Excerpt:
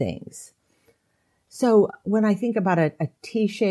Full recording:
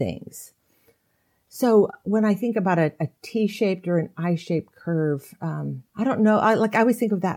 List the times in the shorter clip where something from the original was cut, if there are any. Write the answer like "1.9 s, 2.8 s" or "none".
none